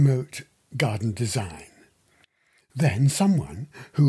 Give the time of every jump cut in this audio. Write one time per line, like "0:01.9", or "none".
none